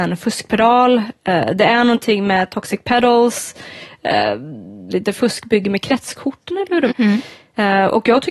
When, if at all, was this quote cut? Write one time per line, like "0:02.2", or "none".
0:04.9
0:06.9